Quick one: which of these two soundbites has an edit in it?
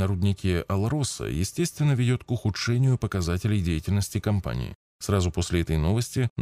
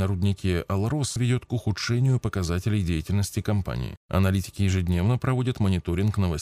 second; 2 cuts; at 1.2 s, 4.0 s

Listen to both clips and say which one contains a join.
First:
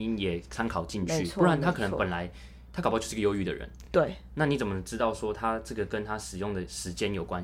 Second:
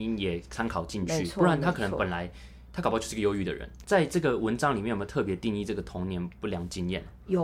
second; 1 cut; at 3.8 s

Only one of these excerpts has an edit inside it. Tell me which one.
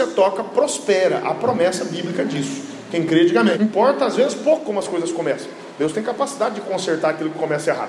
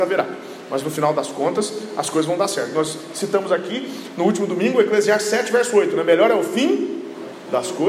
first; 1 cut; at 3.5 s

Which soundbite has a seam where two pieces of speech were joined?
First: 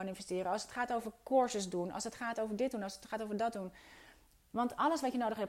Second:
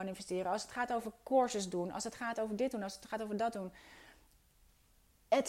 first; 1 cut; at 4.5 s

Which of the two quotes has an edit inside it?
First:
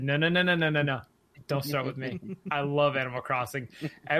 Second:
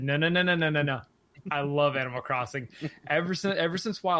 second; 1 cut; at 1.4 s

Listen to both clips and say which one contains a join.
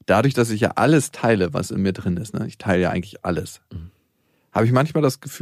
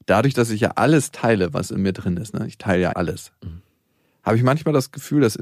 second; 1 cut; at 2.9 s

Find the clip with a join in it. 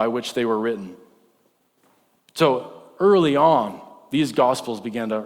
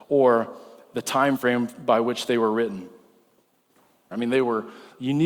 second; 1 cut; at 4.1 s

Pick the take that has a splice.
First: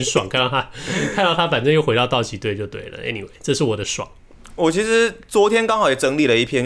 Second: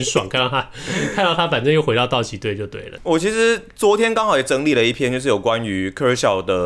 second; 1 cut; at 3.0 s

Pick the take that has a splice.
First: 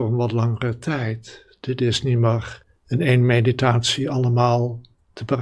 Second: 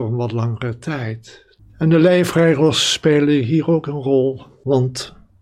second; 1 cut; at 1.6 s

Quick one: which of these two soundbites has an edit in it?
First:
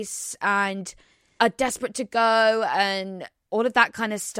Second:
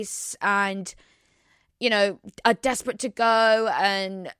first; 1 cut; at 1.4 s

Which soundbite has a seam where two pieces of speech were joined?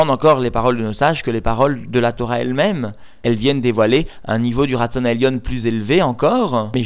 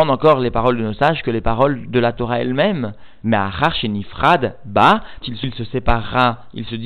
second; 2 cuts; at 3.2 s, 5.2 s

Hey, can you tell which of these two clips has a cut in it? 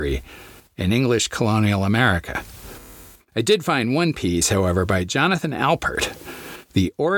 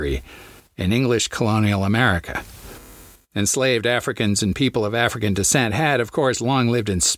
first; 1 cut; at 3.2 s

